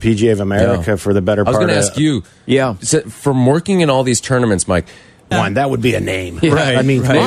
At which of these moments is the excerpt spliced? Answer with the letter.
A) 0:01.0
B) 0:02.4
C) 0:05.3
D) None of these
C